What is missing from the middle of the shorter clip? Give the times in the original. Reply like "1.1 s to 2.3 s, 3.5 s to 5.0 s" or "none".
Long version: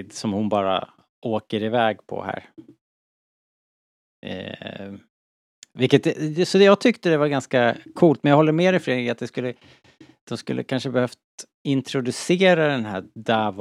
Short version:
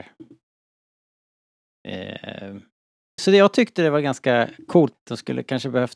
5.6 s to 6.5 s, 8.2 s to 10.1 s